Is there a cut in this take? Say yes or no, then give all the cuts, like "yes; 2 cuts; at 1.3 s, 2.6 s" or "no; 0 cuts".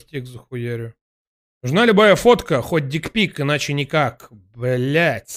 no; 0 cuts